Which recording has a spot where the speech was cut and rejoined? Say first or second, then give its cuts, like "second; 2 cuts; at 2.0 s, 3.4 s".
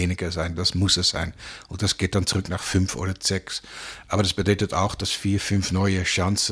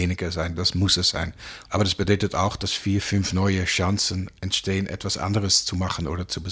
second; 1 cut; at 1.6 s